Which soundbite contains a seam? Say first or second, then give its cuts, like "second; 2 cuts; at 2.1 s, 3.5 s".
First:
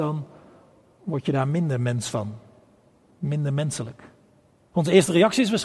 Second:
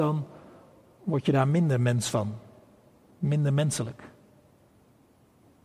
first; 1 cut; at 4.7 s